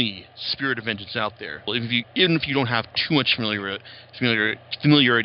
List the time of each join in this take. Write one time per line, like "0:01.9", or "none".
0:01.7